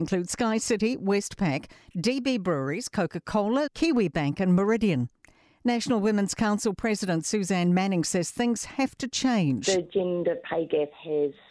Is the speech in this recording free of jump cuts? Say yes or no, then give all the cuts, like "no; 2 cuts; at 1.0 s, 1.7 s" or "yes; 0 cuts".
no; 1 cut; at 3.7 s